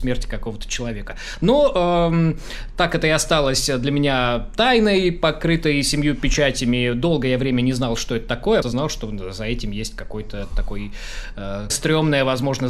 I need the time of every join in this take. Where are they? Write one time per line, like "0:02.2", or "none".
0:08.6
0:11.7